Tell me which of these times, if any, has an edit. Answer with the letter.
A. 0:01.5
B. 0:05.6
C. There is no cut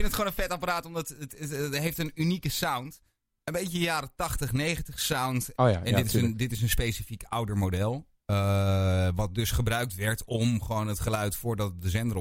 B